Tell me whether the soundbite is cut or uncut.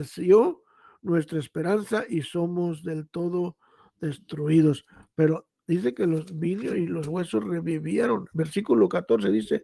uncut